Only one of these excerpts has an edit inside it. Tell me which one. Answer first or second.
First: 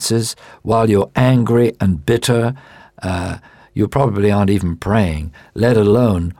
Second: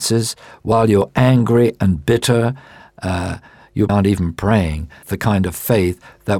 second